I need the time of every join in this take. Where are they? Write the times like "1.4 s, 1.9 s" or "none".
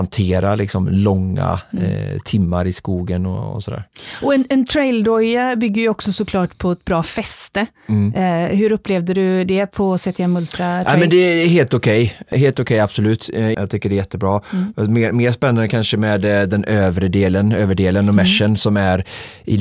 12.3 s, 13.5 s